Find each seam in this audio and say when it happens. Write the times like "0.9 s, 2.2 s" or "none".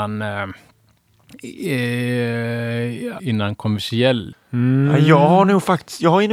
3.2 s, 4.3 s

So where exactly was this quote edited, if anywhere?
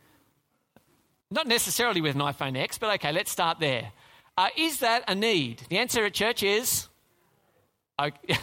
none

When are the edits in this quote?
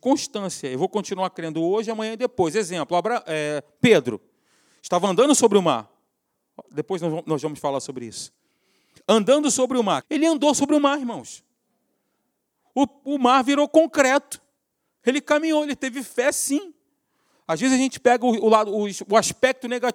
10.0 s

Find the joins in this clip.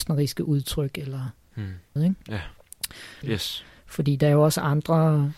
2.0 s, 3.2 s

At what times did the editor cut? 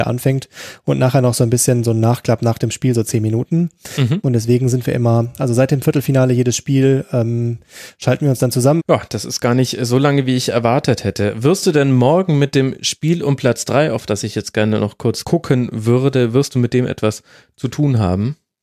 8.8 s

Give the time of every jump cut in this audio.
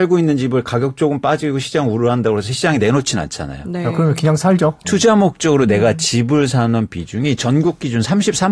4.8 s

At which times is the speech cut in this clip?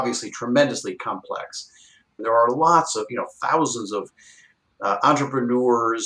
2.2 s

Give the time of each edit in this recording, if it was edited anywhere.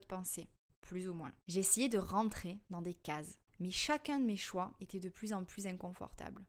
1.4 s, 3.5 s

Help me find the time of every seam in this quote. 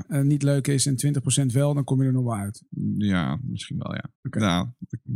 4.2 s

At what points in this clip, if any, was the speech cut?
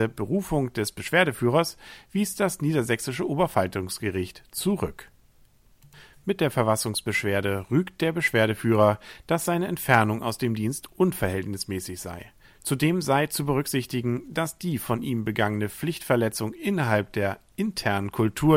12.5 s

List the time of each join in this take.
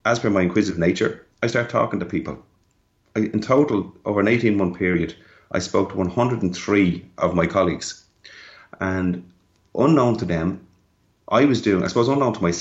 none

